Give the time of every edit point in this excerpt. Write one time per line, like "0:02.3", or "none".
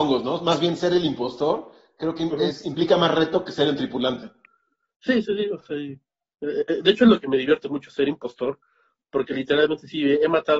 none